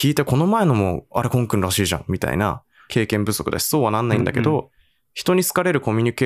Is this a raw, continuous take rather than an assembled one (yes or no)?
no